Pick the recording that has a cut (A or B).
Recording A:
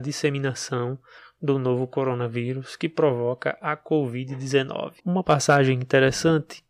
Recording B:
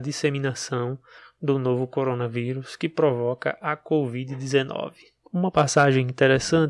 A